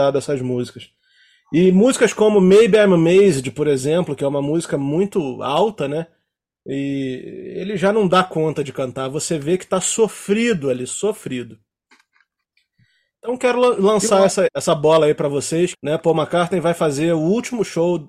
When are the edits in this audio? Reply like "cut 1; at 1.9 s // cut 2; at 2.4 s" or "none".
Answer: cut 1; at 14.5 s // cut 2; at 15.7 s